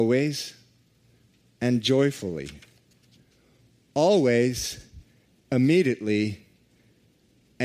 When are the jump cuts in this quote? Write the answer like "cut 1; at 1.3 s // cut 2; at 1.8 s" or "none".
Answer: none